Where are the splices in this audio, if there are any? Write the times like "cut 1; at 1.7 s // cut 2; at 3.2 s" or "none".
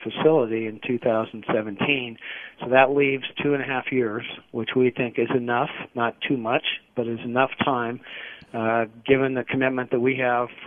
none